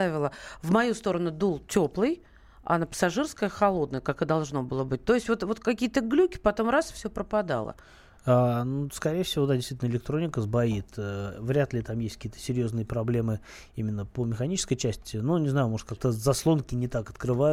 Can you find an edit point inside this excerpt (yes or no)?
no